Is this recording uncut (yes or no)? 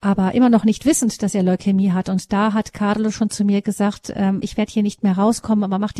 no